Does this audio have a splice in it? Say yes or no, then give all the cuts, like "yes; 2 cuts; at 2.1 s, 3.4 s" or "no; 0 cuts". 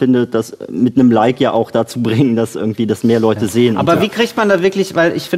no; 0 cuts